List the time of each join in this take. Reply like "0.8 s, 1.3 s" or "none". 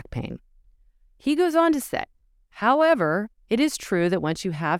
none